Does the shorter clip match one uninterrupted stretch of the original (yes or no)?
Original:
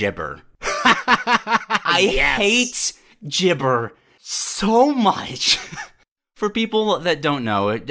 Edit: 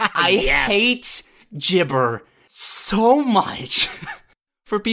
yes